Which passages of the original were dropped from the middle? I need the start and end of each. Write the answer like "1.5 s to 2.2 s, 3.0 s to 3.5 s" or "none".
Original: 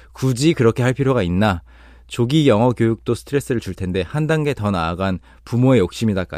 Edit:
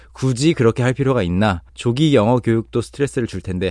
1.7 s to 2.0 s